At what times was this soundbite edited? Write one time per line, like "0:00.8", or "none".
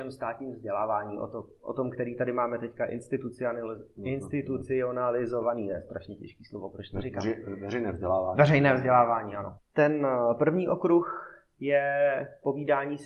0:09.6